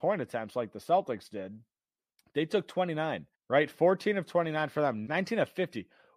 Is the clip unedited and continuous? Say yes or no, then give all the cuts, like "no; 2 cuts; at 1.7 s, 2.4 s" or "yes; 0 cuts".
no; 2 cuts; at 3.3 s, 5.1 s